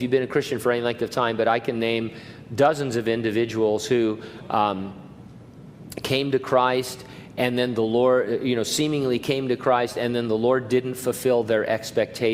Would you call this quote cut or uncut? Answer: uncut